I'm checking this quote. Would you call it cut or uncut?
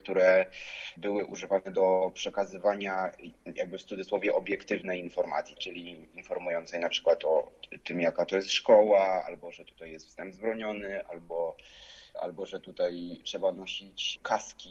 uncut